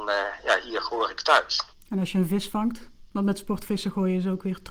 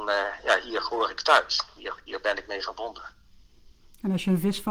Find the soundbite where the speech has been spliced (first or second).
first